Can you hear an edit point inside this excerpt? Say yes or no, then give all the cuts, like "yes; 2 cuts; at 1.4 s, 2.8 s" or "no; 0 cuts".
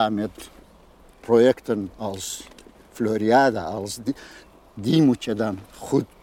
no; 0 cuts